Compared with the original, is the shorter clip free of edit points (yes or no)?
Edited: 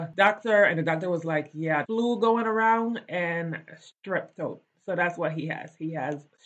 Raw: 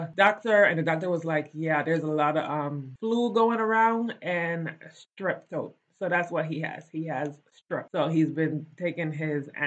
no